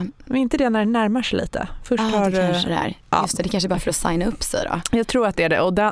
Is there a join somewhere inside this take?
no; 0 cuts

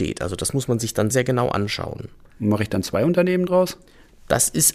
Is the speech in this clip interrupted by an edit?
yes; 1 cut; at 1.1 s

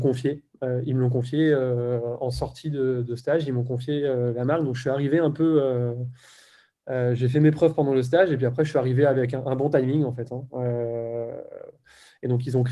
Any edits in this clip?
no; 0 cuts

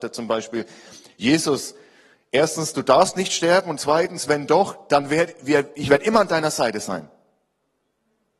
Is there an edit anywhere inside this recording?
no; 0 cuts

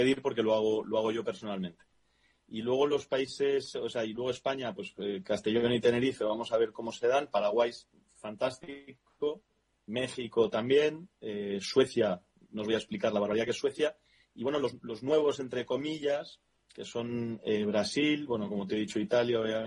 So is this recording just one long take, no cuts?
no; 1 cut; at 2.4 s

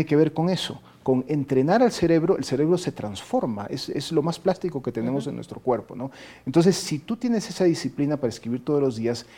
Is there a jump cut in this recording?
no; 0 cuts

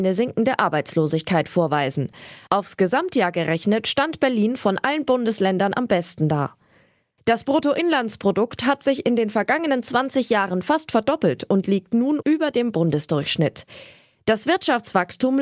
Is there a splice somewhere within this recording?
yes; 1 cut; at 7.2 s

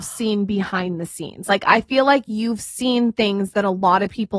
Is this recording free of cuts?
yes; 0 cuts

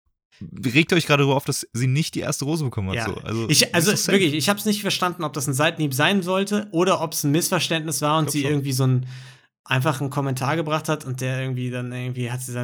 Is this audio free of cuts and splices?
yes; 0 cuts

